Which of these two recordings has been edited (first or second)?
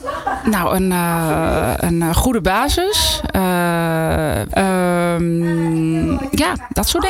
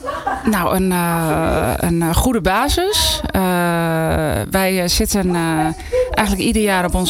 first